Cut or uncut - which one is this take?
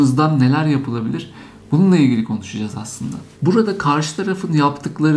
uncut